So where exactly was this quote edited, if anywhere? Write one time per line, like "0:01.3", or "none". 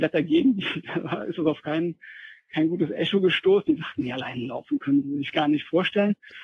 none